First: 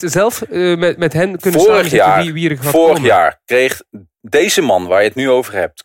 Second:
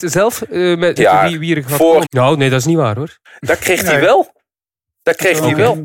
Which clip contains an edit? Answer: second; 2 cuts; at 1.0 s, 2.0 s

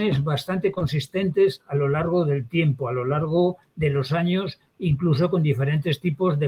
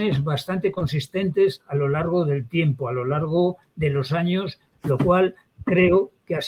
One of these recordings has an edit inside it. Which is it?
second; 1 cut; at 4.7 s

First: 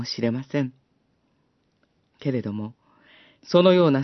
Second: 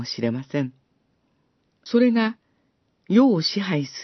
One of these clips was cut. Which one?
second; 1 cut; at 1.9 s

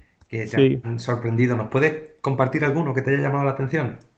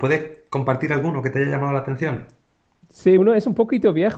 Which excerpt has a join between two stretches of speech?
second; 1 cut; at 3.2 s

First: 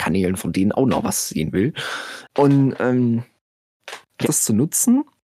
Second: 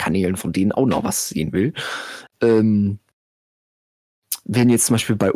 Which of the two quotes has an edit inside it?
first; 2 cuts; at 2.3 s, 4.2 s

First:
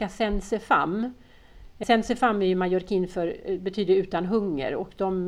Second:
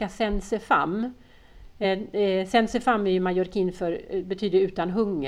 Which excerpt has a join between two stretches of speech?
first; 1 cut; at 1.8 s

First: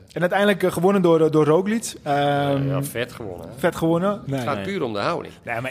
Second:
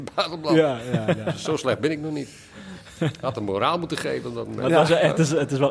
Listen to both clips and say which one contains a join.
first; 1 cut; at 4.3 s

